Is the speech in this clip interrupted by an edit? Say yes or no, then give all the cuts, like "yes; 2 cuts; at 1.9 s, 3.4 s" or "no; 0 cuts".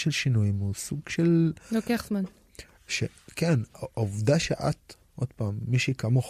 no; 0 cuts